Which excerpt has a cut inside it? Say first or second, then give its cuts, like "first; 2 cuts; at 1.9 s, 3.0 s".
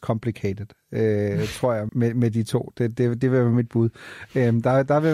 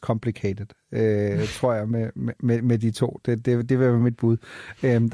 first; 1 cut; at 1.9 s